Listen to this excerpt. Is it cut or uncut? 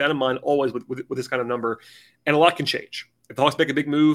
uncut